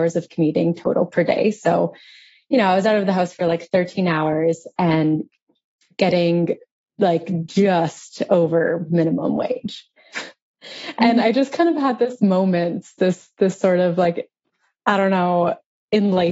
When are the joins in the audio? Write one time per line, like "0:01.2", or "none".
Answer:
0:10.1
0:12.2

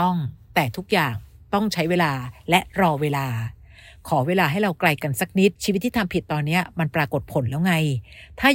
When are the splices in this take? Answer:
0:05.6

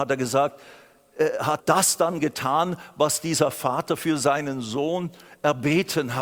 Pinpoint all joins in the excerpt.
0:01.6

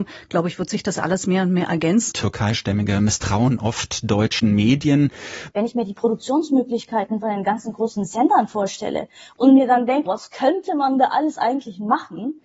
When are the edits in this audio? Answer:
0:02.1
0:05.5
0:10.1

